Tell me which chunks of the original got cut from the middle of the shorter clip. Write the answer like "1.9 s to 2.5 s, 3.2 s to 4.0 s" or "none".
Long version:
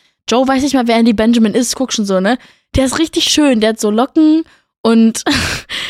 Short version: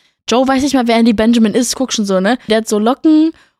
2.5 s to 3.6 s